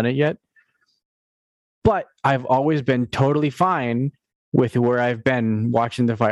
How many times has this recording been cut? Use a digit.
0